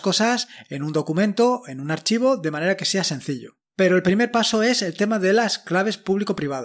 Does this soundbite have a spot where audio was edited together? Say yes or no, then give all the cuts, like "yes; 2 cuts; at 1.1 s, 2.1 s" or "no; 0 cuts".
no; 0 cuts